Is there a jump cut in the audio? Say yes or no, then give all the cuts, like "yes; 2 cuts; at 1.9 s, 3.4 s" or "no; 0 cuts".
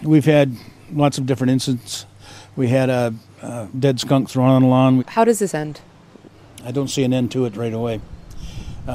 yes; 1 cut; at 5.0 s